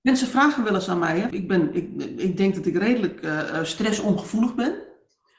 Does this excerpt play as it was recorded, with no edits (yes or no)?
no